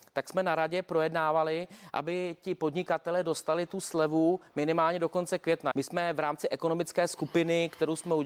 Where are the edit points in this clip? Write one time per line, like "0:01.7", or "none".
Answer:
0:05.7